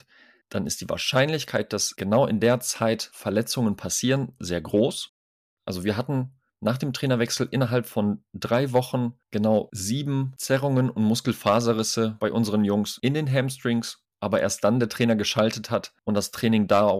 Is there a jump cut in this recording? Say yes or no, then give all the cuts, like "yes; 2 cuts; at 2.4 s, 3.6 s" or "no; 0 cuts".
yes; 2 cuts; at 5.6 s, 14.1 s